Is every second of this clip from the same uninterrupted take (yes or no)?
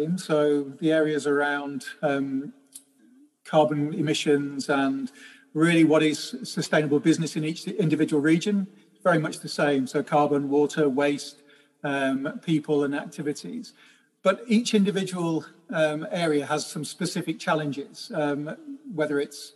yes